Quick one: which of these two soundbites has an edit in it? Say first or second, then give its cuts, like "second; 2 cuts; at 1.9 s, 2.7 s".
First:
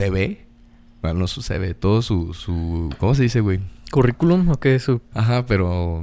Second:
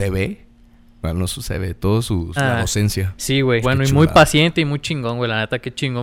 second; 2 cuts; at 2.4 s, 3.6 s